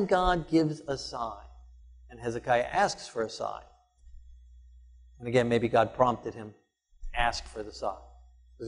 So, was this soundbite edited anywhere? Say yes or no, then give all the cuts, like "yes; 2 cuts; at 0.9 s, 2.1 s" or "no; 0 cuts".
no; 0 cuts